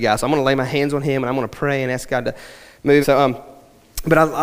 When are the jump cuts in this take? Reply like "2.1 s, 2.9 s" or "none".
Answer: 3.0 s